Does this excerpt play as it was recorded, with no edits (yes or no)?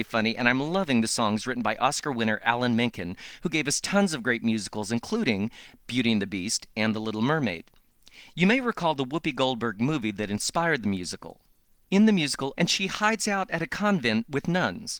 no